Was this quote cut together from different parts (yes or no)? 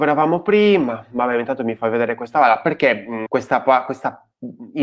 yes